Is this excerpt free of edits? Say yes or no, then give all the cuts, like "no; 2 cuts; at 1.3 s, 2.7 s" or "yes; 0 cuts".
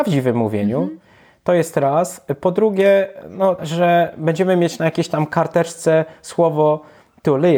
no; 1 cut; at 3.6 s